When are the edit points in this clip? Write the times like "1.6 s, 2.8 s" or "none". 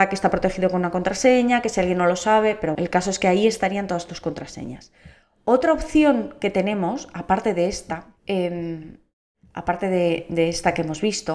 2.7 s, 8.2 s